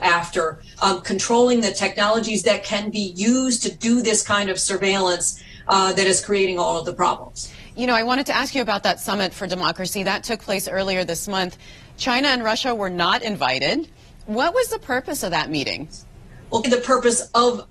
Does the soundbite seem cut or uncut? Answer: cut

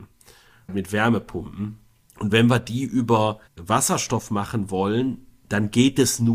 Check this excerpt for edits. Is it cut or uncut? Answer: cut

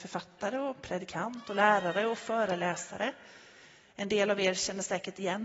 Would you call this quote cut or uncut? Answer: uncut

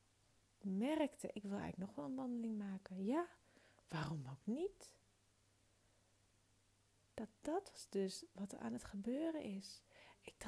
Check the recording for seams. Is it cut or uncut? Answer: cut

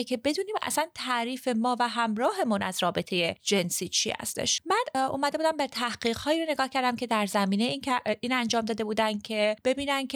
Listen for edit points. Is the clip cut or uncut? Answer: uncut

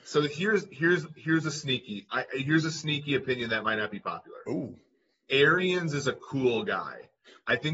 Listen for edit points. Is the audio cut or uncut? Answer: uncut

